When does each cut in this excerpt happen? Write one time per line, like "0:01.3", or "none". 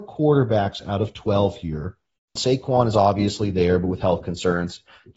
0:02.4